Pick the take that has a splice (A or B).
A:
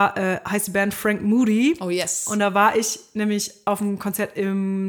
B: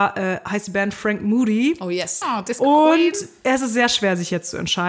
B